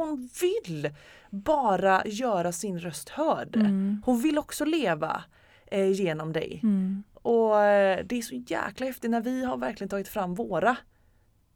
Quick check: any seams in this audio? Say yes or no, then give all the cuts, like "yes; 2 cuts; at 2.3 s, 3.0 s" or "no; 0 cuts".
no; 0 cuts